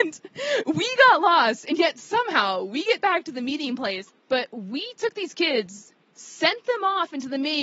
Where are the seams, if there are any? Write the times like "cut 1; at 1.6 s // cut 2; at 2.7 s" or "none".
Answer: cut 1; at 4.1 s // cut 2; at 6.1 s